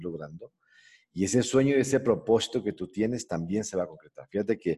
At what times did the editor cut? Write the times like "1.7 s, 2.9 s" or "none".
none